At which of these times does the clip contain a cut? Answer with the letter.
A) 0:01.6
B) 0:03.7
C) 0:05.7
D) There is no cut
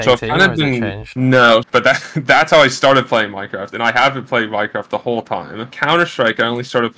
A